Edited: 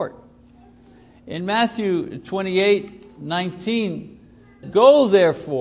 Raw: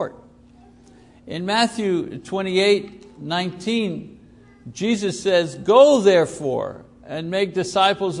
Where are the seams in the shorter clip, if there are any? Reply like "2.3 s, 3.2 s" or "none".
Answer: 4.6 s